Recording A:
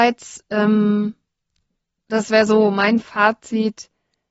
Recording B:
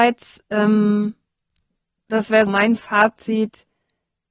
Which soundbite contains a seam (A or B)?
B